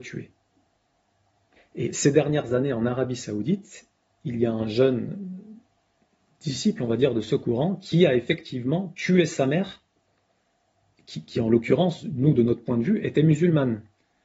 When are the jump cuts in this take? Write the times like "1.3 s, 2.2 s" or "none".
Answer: 1.6 s